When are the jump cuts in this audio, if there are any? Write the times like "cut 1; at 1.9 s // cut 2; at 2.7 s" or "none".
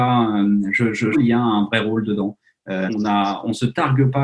cut 1; at 1.1 s // cut 2; at 2.9 s